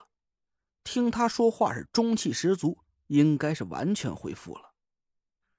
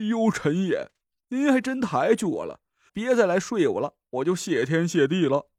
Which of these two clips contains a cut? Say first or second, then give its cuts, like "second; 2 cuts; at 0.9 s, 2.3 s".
second; 1 cut; at 2.9 s